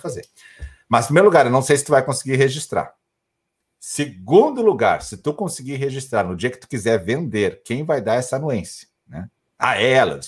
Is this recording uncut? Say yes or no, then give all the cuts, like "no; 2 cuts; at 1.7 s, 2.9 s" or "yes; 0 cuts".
yes; 0 cuts